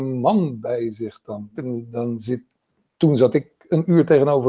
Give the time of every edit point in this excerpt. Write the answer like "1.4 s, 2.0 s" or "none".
1.6 s